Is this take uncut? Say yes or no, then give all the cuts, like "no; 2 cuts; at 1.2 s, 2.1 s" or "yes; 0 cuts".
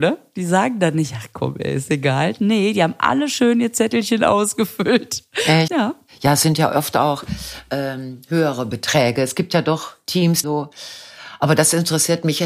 no; 2 cuts; at 5.7 s, 10.4 s